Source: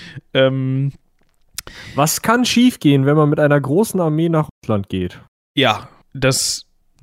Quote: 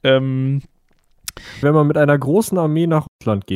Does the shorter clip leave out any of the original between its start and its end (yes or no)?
yes